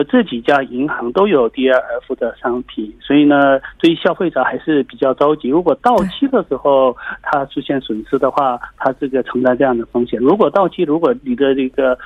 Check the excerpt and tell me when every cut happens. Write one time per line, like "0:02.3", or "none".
none